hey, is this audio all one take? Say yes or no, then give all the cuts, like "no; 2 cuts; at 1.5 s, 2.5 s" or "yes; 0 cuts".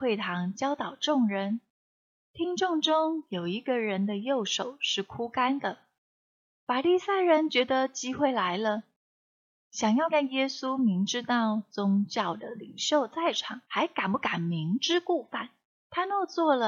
no; 2 cuts; at 10.1 s, 13.6 s